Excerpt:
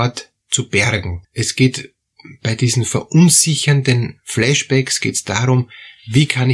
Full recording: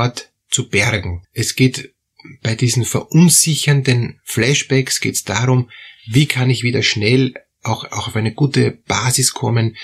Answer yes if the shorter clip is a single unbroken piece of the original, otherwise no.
yes